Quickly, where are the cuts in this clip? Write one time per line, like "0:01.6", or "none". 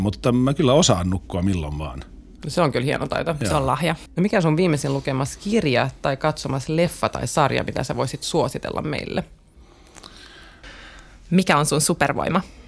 0:04.1
0:10.6